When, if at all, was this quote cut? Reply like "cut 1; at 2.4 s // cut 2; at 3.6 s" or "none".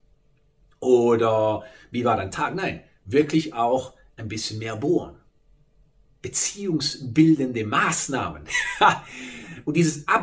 none